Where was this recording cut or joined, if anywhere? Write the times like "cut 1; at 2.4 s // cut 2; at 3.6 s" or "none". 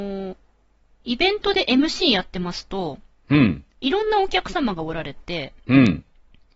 none